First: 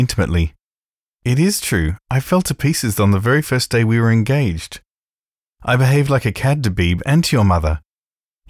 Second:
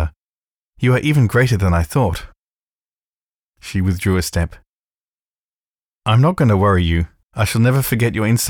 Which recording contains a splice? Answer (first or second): second